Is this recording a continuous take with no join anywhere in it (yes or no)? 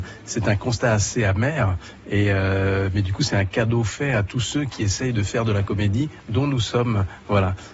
yes